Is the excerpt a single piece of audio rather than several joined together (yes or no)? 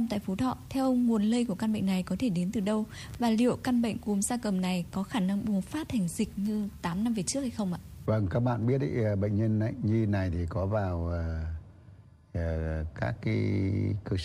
yes